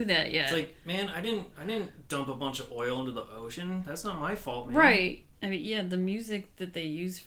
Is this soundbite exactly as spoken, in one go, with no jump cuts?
no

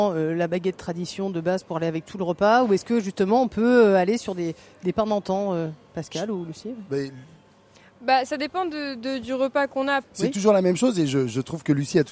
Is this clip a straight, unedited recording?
no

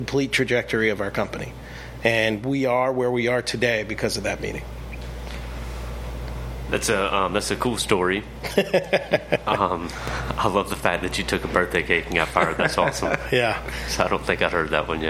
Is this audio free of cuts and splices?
yes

